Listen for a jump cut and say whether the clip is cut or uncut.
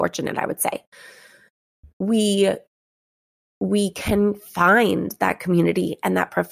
uncut